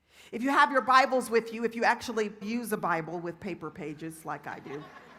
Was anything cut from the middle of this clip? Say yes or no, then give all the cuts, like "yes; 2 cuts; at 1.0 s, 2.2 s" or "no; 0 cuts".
yes; 1 cut; at 2.4 s